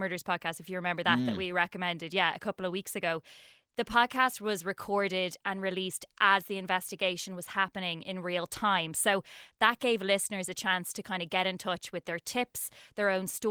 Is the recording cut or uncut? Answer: uncut